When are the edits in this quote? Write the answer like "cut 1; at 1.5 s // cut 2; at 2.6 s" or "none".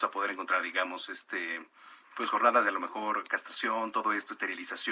none